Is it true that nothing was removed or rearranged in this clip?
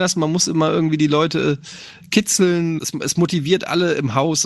no; 1 cut; at 2.8 s

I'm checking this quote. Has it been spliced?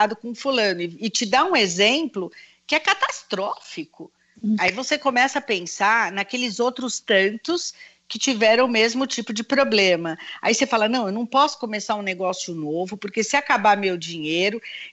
yes; 1 cut; at 4.6 s

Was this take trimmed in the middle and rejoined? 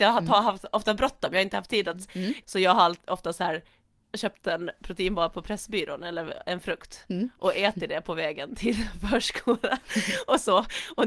yes; 1 cut; at 2.4 s

